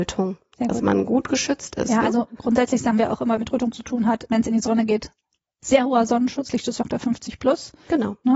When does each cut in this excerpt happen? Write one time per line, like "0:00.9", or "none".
0:03.4